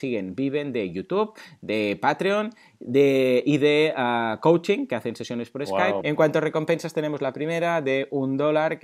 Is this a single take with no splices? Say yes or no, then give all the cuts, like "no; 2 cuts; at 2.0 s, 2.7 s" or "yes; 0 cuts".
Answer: no; 1 cut; at 6.0 s